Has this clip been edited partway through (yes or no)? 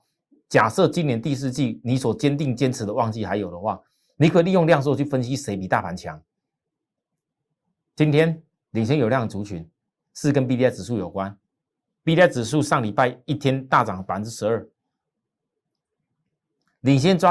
no